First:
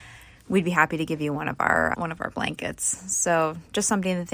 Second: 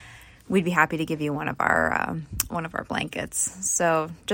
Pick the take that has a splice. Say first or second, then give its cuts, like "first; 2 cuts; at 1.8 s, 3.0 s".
first; 1 cut; at 1.9 s